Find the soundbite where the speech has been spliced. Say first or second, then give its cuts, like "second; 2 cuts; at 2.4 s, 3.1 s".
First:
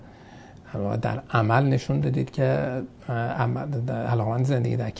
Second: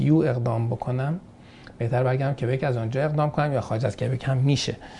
first; 1 cut; at 3.0 s